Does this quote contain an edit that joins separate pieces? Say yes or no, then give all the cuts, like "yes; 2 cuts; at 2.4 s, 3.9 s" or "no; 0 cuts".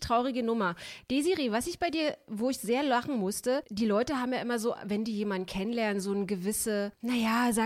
no; 0 cuts